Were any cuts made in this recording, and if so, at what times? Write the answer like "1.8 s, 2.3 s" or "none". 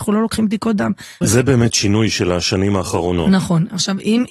1.2 s